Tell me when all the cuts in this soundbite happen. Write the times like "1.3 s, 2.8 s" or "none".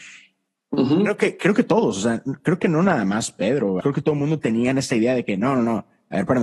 3.8 s